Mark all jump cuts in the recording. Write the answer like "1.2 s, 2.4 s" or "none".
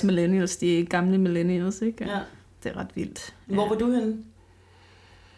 none